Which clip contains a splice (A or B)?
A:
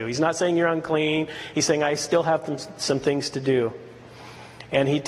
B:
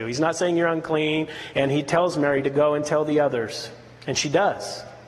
B